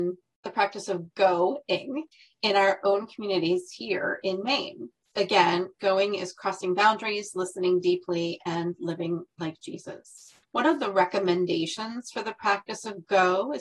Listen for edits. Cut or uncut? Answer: cut